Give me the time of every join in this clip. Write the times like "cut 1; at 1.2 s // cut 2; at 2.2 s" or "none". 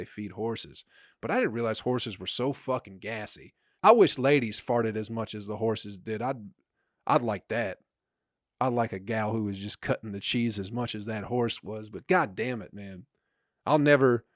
cut 1; at 3.8 s